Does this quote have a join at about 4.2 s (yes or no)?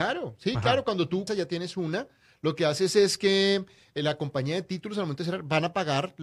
no